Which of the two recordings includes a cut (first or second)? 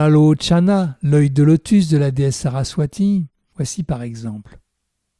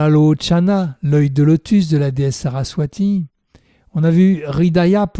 first